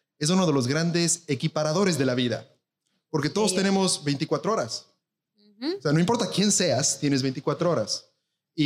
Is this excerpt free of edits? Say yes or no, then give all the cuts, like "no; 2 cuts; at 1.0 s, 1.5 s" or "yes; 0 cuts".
yes; 0 cuts